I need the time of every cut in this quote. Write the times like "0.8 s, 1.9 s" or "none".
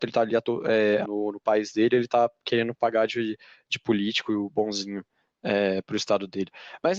1.0 s